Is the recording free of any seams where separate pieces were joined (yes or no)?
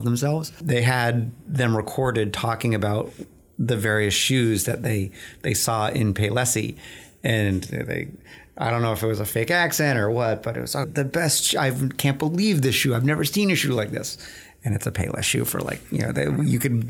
no